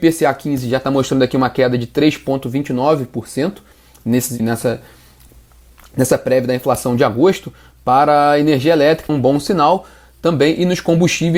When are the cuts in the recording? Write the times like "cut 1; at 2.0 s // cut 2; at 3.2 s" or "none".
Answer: cut 1; at 4.4 s // cut 2; at 9.1 s